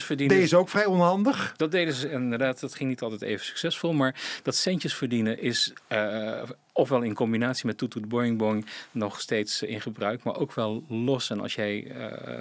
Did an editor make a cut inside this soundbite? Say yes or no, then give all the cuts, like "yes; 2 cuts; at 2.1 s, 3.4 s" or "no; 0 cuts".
no; 0 cuts